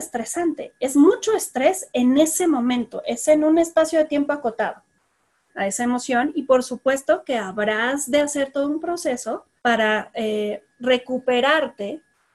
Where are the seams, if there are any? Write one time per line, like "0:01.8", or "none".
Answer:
0:05.5
0:09.6